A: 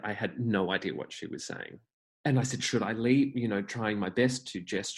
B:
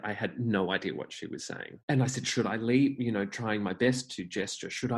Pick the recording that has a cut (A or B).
B